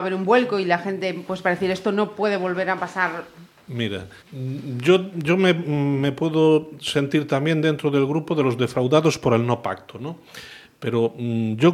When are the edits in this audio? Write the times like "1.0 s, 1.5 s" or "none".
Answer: 4.2 s